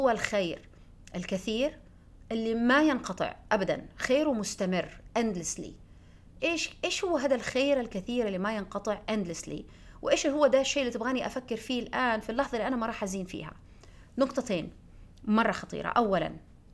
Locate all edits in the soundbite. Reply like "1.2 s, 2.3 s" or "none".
6.4 s

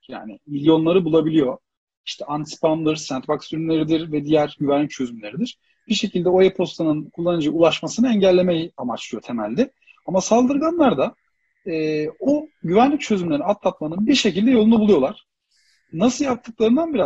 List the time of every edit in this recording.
none

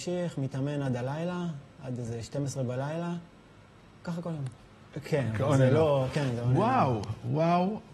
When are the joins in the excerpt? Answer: 4.9 s

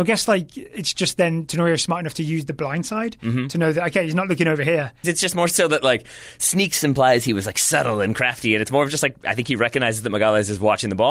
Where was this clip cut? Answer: 5.0 s

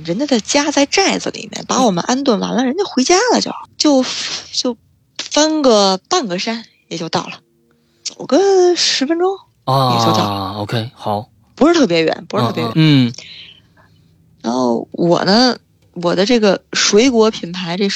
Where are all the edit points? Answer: 3.6 s, 12.7 s

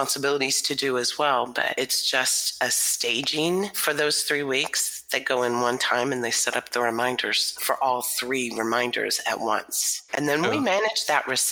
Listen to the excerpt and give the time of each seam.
7.6 s

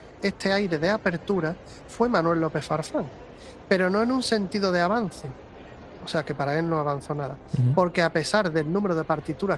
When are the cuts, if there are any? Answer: none

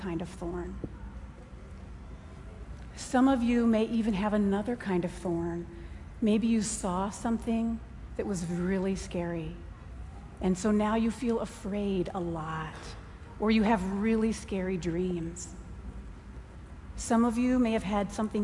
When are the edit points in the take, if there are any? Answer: none

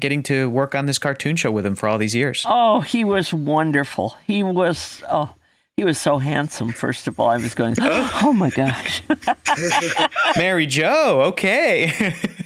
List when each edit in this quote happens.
none

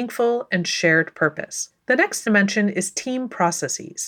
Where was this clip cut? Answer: 1.8 s

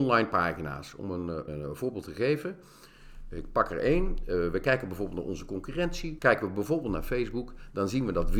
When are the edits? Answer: 1.5 s, 6.2 s

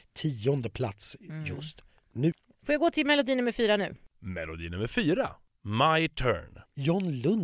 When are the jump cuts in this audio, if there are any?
none

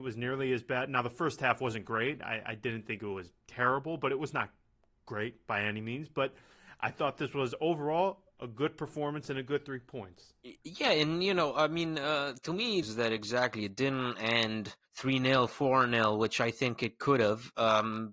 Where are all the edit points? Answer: 12.8 s, 14.9 s

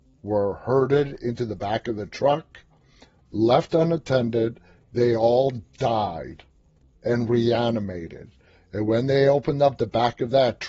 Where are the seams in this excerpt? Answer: none

